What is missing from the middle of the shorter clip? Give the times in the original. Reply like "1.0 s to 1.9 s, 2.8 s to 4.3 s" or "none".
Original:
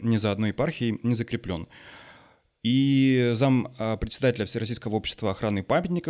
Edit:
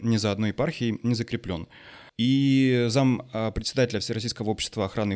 2.1 s to 2.5 s